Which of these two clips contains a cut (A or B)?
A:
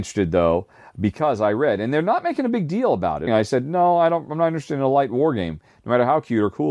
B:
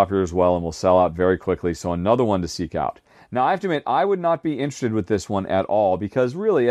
A